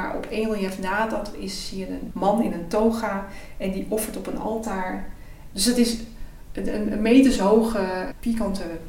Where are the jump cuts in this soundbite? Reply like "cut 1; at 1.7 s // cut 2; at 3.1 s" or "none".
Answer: cut 1; at 5.5 s